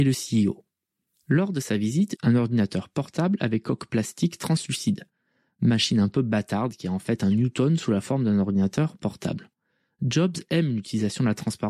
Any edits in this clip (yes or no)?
yes